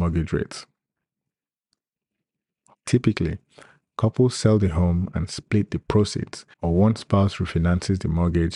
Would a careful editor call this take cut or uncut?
cut